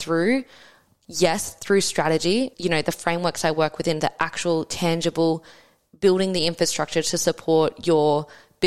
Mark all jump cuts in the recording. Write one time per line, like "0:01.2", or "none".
0:02.5